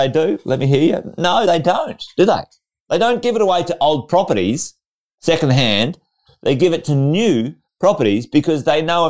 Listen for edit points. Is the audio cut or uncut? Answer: uncut